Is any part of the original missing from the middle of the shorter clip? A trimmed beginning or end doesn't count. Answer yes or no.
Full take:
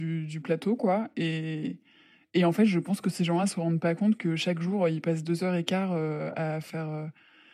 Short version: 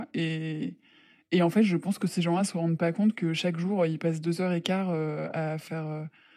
no